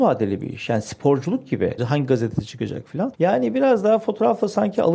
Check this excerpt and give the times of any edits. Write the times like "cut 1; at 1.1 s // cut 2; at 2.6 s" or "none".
cut 1; at 1.8 s // cut 2; at 3.1 s